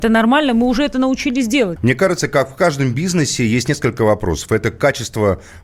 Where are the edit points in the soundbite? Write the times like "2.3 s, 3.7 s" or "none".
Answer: 1.8 s